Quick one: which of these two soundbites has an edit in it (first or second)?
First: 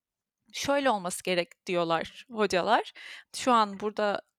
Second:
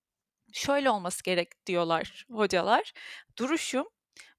first